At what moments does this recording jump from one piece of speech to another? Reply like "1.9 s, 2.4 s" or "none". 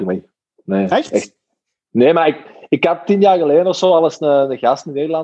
none